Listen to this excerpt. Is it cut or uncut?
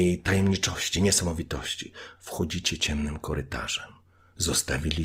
uncut